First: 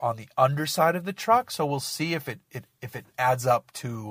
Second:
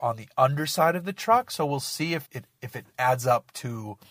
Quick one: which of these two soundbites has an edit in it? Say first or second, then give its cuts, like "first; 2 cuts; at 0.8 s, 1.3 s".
second; 1 cut; at 2.2 s